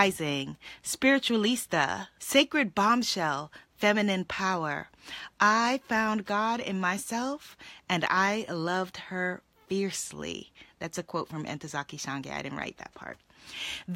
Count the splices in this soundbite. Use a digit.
1